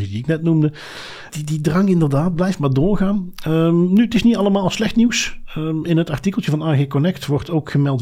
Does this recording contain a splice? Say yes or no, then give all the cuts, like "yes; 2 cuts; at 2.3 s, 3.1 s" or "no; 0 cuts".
yes; 1 cut; at 1.3 s